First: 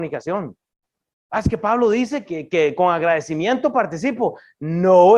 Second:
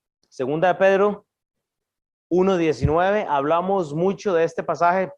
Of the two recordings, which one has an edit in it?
first; 1 cut; at 1.1 s

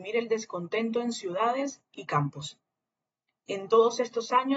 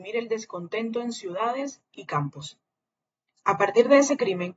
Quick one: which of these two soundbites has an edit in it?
second; 1 cut; at 3.4 s

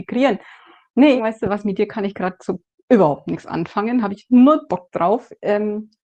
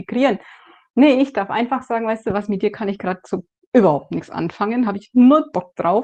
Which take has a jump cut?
first; 1 cut; at 1.2 s

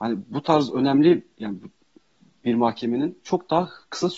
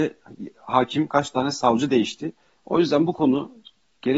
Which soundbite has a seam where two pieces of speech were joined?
second; 1 cut; at 2.6 s

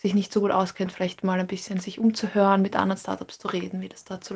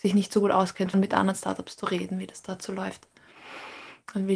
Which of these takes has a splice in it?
second; 1 cut; at 0.9 s

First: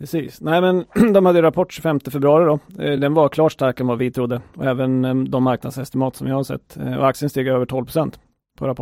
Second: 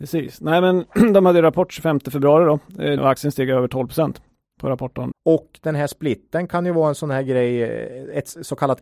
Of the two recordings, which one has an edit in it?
second; 2 cuts; at 3.0 s, 5.1 s

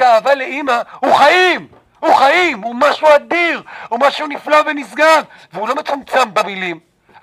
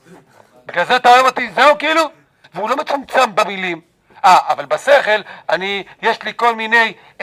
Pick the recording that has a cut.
second; 1 cut; at 2.4 s

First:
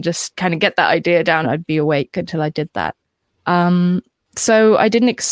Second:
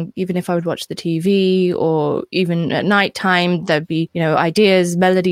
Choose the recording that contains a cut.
first; 1 cut; at 1.4 s

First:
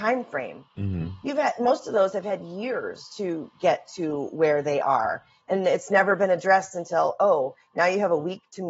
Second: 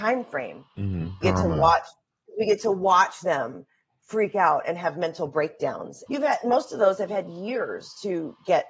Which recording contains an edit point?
second; 2 cuts; at 1.2 s, 6.1 s

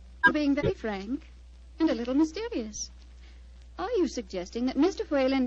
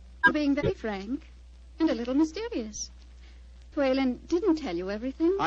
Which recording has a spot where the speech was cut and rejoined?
second; 1 cut; at 3.7 s

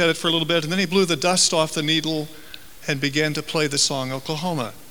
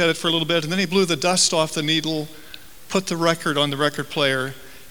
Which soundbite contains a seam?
first; 1 cut; at 2.8 s

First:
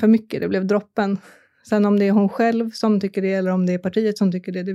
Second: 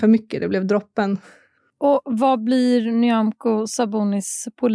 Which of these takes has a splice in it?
second; 1 cut; at 1.6 s

